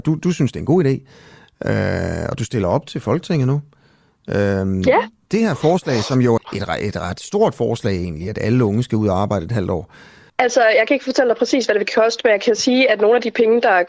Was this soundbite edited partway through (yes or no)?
yes